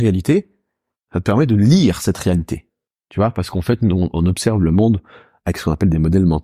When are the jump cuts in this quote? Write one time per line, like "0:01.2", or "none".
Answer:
none

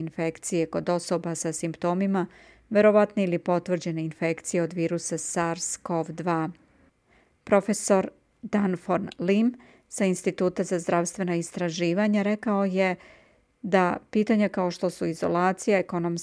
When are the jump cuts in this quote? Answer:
none

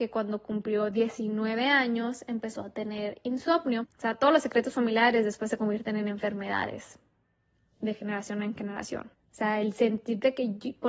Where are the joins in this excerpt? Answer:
0:03.8
0:09.1

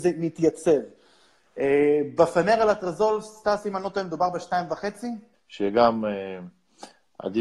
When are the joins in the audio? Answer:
0:05.3

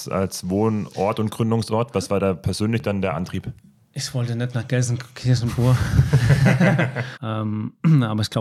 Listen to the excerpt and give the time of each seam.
0:07.1

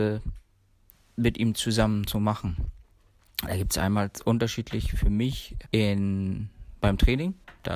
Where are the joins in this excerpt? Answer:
0:05.6

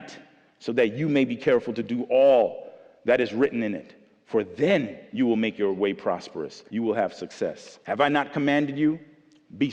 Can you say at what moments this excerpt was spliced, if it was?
0:06.7
0:07.8

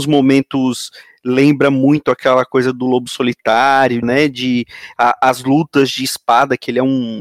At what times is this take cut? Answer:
0:04.0

